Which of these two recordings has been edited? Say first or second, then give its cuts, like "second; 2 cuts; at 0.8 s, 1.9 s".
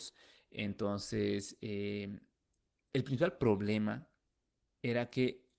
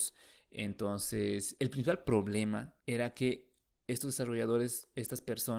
second; 2 cuts; at 1.6 s, 2.8 s